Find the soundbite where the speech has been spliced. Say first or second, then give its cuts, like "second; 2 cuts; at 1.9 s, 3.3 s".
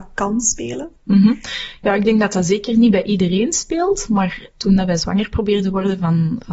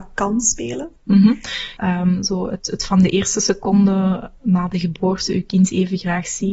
second; 1 cut; at 1.8 s